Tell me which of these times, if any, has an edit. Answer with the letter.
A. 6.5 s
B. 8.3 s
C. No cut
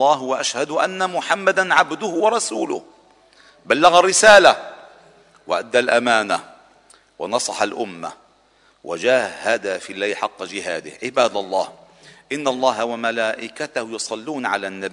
C